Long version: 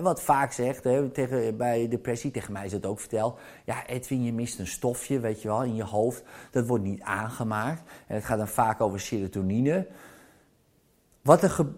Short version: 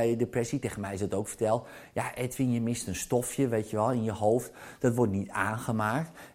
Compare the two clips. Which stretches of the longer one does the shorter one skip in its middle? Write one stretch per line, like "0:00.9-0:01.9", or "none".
none